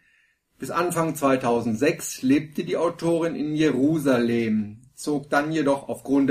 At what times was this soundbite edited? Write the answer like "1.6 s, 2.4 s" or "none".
none

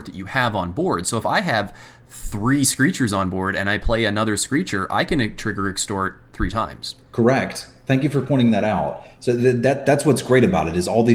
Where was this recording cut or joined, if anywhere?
none

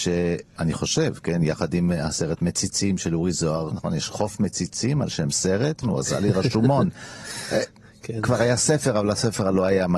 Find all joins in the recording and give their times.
3.7 s, 5.8 s

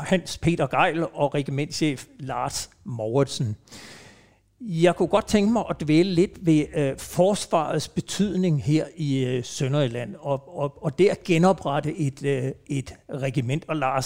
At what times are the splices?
none

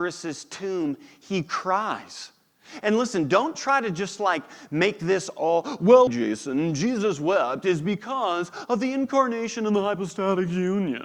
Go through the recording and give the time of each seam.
6.1 s

